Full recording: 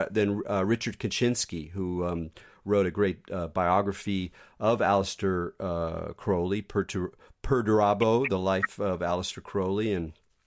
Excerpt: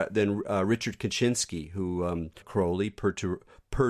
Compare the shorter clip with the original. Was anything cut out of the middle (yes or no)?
yes